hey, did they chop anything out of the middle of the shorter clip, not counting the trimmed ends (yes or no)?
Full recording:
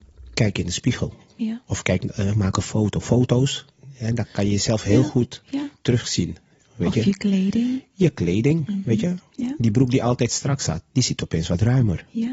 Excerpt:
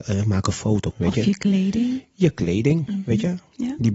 yes